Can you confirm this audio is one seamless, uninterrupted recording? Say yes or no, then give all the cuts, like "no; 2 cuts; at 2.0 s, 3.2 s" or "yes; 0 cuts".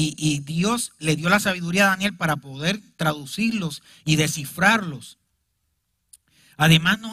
yes; 0 cuts